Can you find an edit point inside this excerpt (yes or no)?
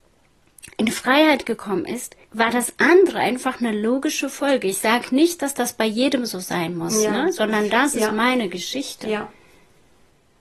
yes